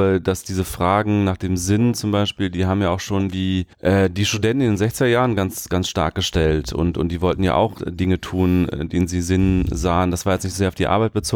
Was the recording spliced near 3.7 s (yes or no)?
yes